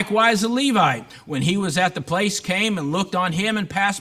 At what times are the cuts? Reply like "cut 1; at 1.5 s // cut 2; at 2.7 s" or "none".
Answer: none

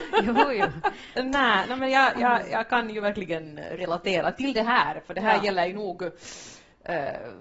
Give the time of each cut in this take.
cut 1; at 1.2 s

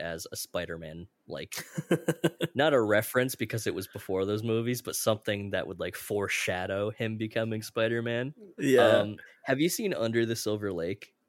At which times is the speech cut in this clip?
cut 1; at 8.6 s

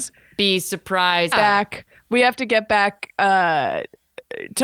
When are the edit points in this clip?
cut 1; at 1.3 s

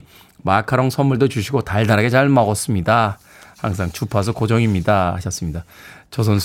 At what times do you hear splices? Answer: none

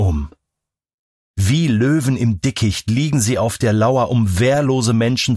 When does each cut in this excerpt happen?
none

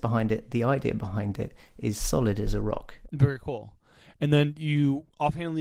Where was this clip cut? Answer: cut 1; at 3.0 s

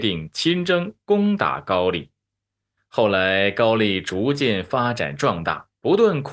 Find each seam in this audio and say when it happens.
cut 1; at 2.8 s

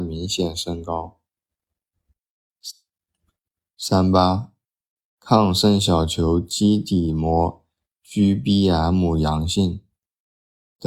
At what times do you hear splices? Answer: cut 1; at 5.0 s

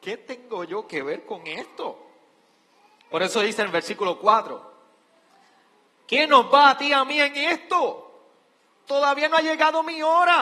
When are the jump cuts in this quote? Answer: none

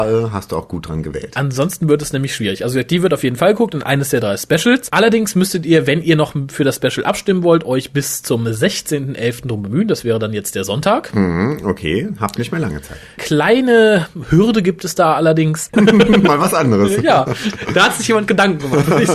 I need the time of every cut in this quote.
cut 1; at 13.2 s // cut 2; at 15.7 s

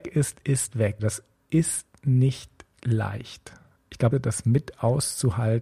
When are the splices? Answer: cut 1; at 1.0 s // cut 2; at 4.1 s

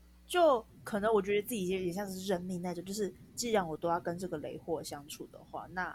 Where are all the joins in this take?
none

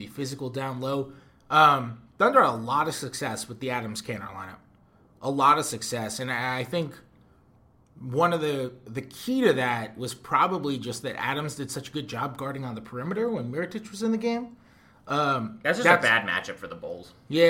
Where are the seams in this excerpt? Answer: none

